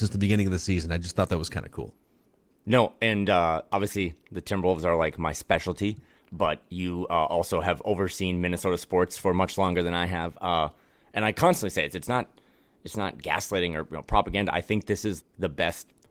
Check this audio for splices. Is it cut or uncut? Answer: cut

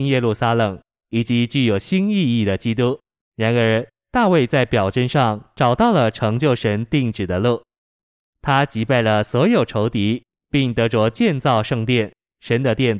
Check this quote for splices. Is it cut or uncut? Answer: cut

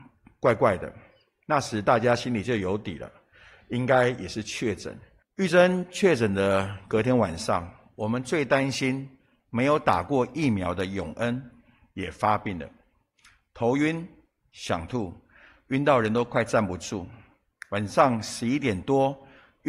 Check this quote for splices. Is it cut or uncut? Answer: cut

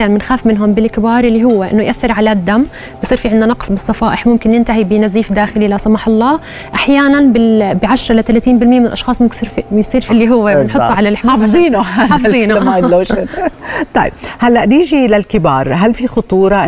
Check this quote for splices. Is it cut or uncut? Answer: cut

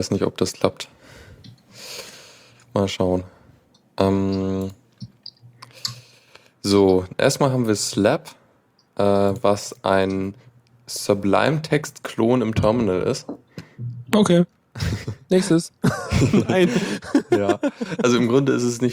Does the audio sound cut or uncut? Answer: uncut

